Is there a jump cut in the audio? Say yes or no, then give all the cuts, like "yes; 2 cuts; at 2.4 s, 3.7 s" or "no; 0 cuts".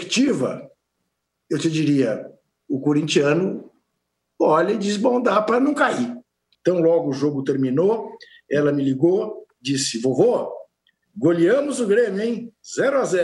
yes; 1 cut; at 6.5 s